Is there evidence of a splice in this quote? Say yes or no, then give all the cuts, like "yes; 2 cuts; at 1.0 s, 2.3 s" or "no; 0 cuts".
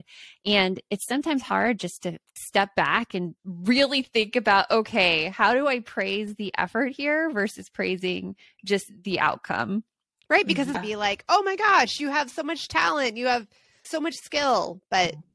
yes; 2 cuts; at 3.4 s, 10.7 s